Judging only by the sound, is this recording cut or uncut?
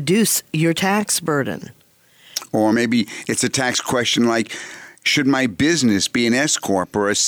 uncut